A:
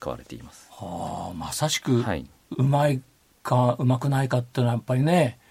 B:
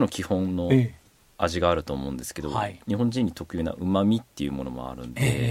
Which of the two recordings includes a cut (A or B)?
A